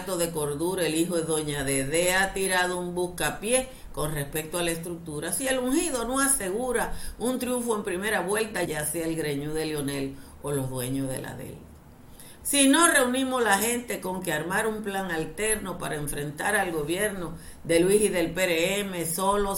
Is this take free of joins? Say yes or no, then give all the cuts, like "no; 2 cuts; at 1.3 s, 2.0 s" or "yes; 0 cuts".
no; 2 cuts; at 8.6 s, 12.4 s